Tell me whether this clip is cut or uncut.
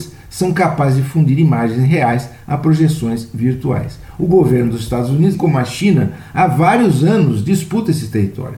cut